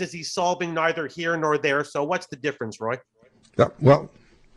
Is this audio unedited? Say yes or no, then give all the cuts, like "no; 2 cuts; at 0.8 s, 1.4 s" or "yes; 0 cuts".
yes; 0 cuts